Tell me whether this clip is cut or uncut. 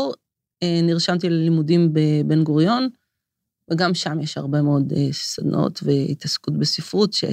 uncut